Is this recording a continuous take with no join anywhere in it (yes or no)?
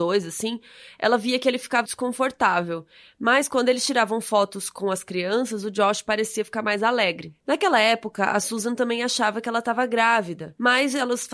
no